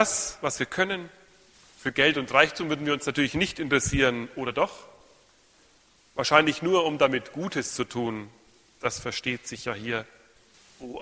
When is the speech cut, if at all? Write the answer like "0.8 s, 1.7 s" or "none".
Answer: none